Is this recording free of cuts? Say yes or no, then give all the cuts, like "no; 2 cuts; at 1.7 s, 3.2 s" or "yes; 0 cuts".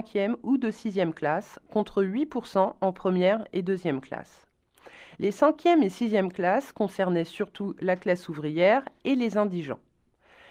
yes; 0 cuts